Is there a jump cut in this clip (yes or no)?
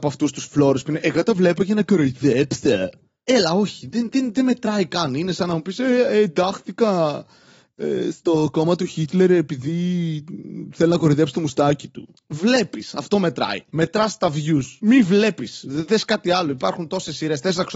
no